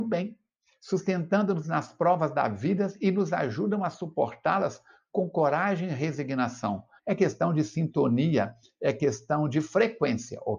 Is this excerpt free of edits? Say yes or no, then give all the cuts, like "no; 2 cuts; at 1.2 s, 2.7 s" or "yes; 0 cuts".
no; 1 cut; at 7.0 s